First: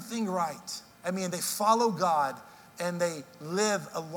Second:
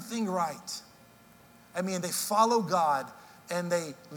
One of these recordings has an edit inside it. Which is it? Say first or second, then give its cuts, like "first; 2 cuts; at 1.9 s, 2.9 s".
first; 1 cut; at 0.9 s